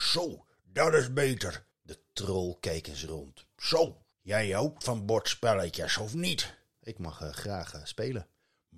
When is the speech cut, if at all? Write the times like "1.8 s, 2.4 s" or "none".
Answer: 1.7 s, 4.1 s, 6.7 s